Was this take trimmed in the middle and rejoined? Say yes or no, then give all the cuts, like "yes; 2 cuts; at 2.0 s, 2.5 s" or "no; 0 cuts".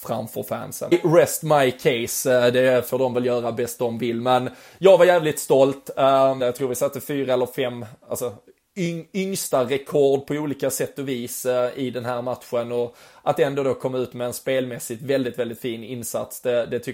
yes; 2 cuts; at 0.9 s, 6.4 s